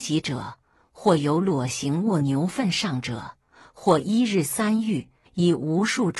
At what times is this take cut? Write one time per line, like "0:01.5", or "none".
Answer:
0:05.3